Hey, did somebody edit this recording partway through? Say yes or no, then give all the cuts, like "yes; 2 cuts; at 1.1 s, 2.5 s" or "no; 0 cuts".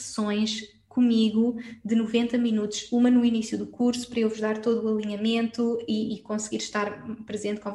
no; 0 cuts